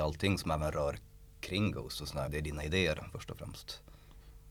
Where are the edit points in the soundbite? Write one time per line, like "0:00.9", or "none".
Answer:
0:02.3